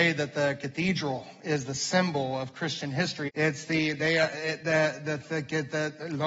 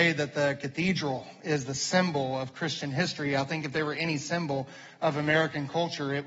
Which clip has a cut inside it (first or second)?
first